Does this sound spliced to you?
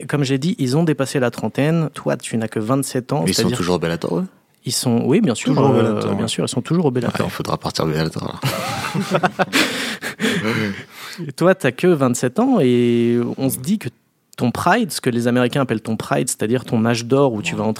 no; 0 cuts

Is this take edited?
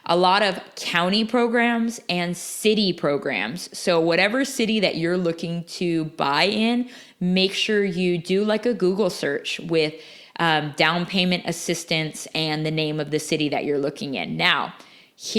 no; 0 cuts

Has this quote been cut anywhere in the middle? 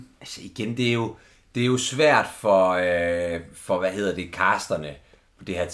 no; 0 cuts

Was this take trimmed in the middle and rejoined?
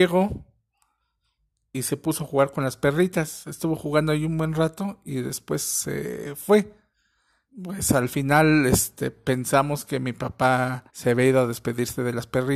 yes; 2 cuts; at 7.5 s, 10.9 s

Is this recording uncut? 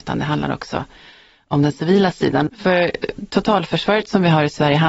no; 1 cut; at 2.5 s

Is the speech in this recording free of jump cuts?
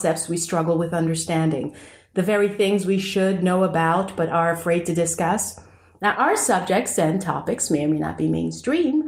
yes; 0 cuts

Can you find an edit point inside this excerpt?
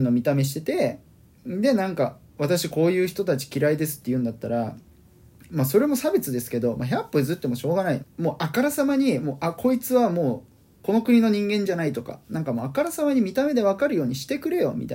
yes; 1 cut; at 8.0 s

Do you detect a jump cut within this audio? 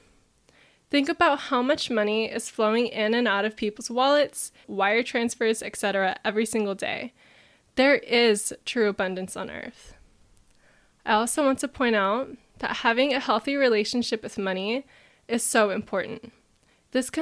yes; 1 cut; at 4.6 s

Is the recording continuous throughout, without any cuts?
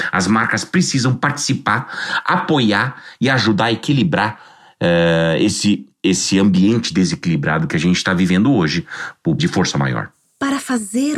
no; 1 cut; at 9.4 s

